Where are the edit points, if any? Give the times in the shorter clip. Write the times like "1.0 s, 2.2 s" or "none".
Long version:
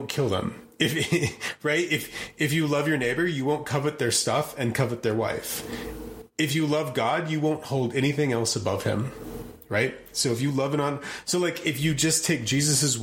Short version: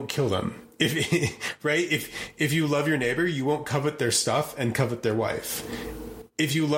none